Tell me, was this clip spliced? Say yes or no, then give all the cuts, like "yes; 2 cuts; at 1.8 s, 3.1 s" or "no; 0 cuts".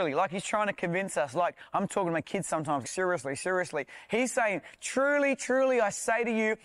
yes; 1 cut; at 2.8 s